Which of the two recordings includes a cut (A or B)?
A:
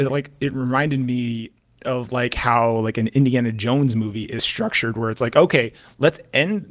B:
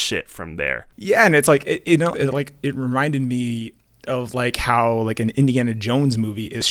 B